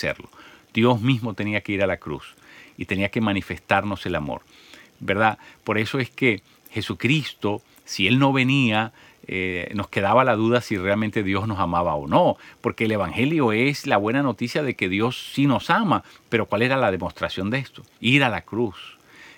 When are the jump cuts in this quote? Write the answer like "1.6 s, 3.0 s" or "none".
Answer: 18.0 s